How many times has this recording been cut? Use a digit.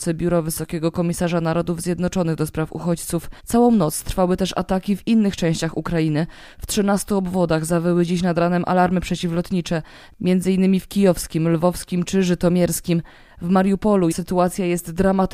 2